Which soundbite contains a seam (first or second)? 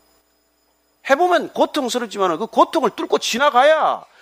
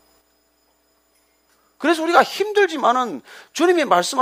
first